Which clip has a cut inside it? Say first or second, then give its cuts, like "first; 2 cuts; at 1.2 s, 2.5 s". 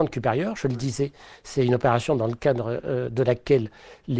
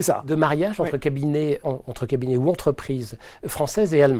second; 1 cut; at 1.6 s